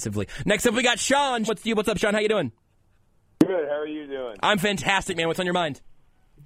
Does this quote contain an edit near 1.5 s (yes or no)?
yes